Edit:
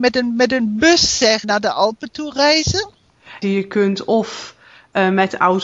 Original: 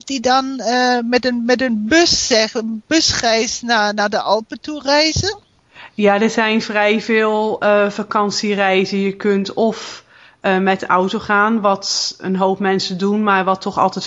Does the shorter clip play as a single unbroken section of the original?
no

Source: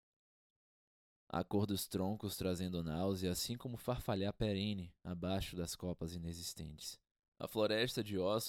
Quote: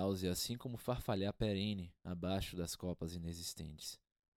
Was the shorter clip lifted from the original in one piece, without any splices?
yes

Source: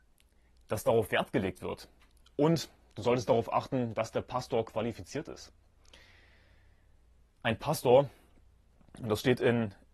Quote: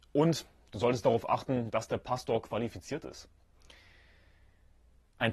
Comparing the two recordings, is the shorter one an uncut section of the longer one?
yes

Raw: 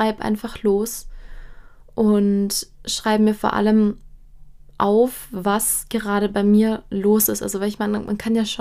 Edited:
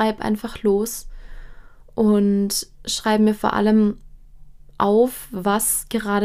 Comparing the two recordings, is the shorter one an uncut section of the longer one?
yes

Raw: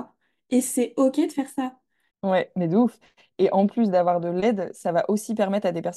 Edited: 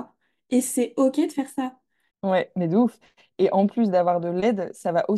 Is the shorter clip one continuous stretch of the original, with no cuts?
yes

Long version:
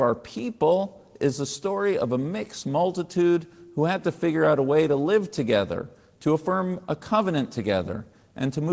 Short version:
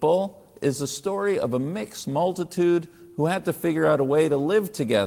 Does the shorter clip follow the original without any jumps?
yes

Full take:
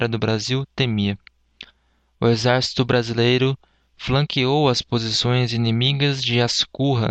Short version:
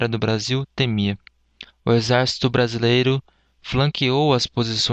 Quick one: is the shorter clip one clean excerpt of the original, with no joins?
no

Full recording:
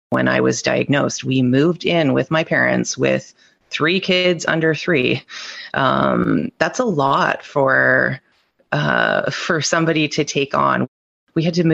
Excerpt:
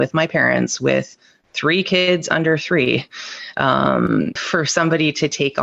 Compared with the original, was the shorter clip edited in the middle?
yes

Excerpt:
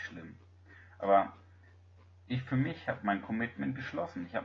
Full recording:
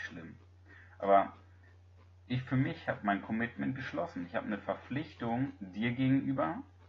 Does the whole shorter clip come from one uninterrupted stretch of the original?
yes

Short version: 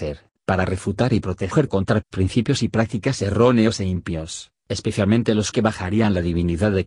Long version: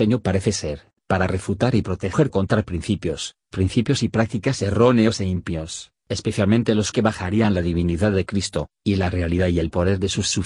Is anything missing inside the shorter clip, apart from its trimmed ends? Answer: yes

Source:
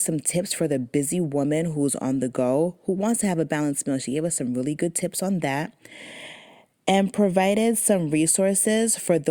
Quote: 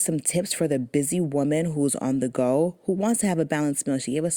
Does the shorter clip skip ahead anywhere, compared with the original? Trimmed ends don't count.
no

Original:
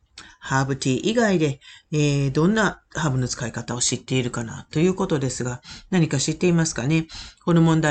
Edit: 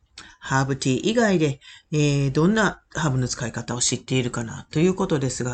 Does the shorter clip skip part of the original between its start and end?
no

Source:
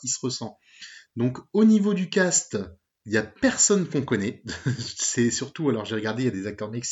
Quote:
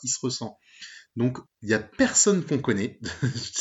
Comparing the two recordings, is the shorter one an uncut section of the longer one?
no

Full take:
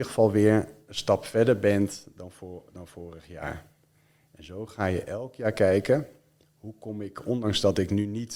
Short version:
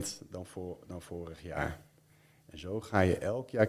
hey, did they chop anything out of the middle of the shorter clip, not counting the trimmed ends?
no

